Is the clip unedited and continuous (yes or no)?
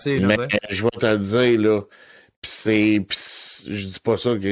yes